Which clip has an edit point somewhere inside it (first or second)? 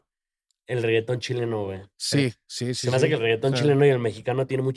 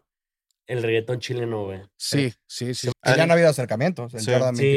second